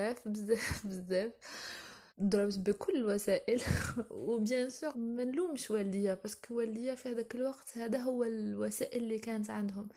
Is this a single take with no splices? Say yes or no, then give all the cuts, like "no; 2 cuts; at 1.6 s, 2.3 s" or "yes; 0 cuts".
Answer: no; 2 cuts; at 2.1 s, 4.9 s